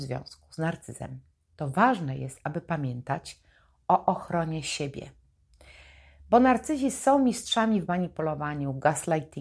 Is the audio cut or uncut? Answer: uncut